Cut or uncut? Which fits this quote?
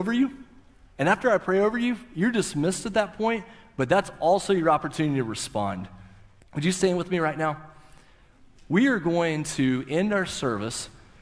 cut